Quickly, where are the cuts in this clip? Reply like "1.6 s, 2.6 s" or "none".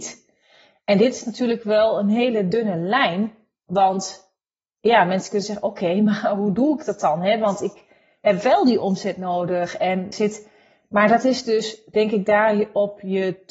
10.1 s